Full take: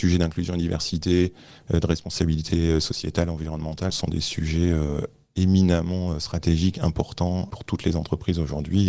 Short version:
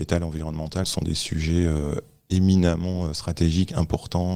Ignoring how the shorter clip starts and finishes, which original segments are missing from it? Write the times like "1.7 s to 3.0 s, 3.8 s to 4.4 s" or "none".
none

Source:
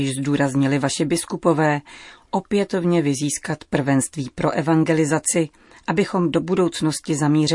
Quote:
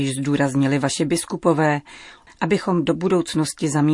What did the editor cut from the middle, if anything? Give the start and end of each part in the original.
2.3 s to 5.7 s

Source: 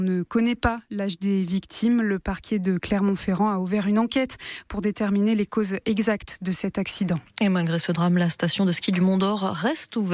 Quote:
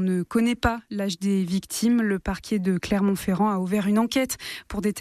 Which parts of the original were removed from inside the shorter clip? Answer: none

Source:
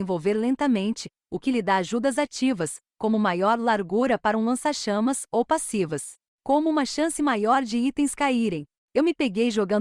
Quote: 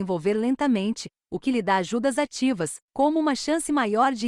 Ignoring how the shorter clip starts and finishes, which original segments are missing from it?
2.8 s to 6.3 s

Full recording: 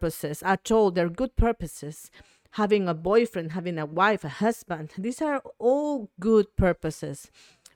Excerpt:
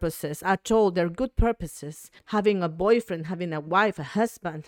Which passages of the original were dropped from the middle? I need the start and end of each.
2.2 s to 2.4 s

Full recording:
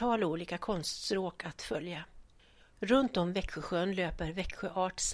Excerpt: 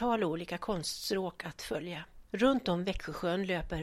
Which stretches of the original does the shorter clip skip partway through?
2.3 s to 2.8 s

